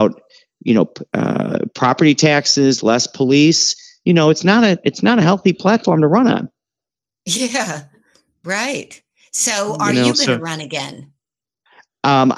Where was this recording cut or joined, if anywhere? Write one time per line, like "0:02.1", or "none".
none